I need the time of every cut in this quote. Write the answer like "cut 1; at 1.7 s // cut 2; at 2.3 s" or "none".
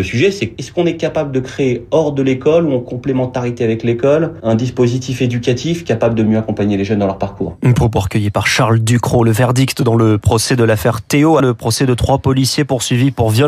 cut 1; at 11.4 s